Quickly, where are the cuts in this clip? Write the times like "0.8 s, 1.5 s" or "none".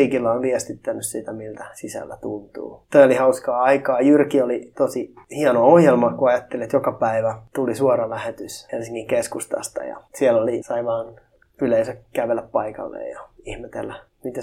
10.6 s